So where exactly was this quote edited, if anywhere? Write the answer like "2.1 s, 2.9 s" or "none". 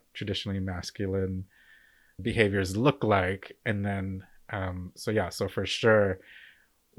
2.2 s